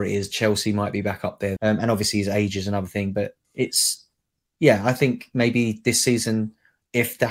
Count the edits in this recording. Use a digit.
2